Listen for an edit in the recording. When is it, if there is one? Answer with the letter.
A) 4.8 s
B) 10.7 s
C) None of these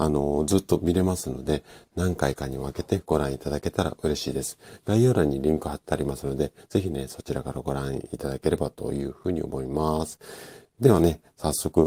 C